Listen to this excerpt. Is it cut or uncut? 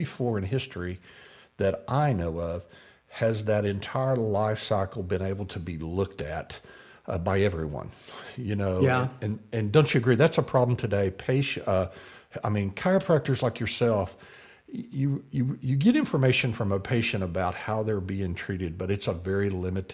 uncut